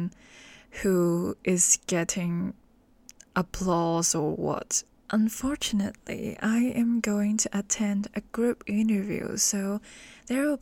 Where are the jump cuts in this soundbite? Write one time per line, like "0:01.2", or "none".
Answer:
0:04.9